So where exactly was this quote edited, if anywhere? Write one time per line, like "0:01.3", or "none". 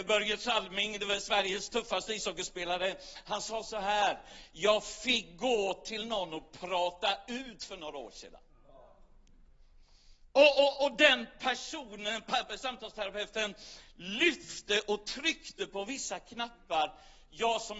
none